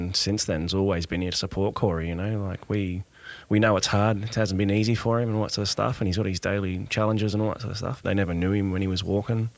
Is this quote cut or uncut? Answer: cut